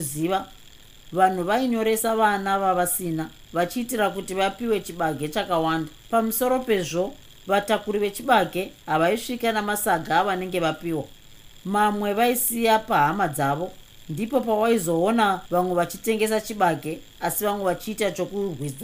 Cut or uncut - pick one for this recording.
cut